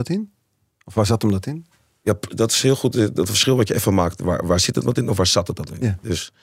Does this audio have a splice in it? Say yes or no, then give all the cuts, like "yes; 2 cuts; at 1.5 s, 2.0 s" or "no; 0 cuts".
no; 0 cuts